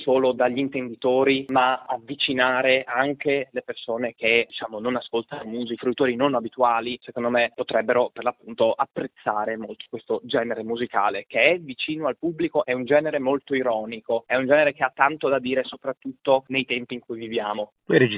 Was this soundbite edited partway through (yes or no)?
yes